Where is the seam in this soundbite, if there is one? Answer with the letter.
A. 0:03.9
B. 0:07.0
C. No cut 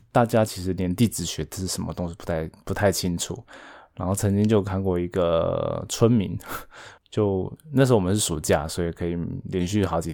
B